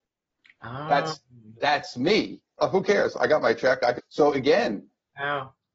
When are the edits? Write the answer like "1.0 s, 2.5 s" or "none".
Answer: 2.6 s, 4.0 s